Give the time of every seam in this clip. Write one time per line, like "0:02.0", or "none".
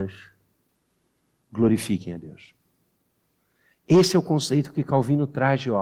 none